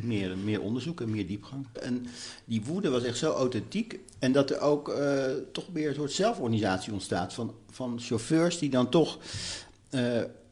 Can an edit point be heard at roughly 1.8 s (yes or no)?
yes